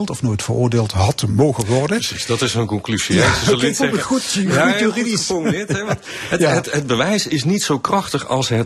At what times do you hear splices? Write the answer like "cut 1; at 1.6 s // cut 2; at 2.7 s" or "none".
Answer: cut 1; at 6.6 s